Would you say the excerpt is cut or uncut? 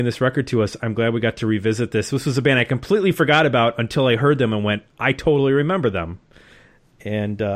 uncut